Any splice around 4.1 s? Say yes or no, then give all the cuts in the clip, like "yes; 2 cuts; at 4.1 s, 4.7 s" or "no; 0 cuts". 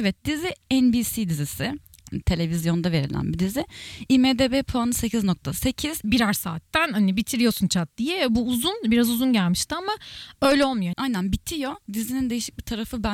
no; 3 cuts; at 2.2 s, 6.0 s, 10.9 s